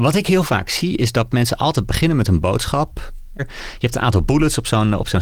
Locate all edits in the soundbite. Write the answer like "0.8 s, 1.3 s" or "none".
3.4 s